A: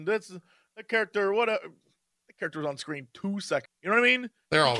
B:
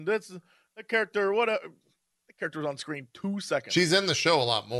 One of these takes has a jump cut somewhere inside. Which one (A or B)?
A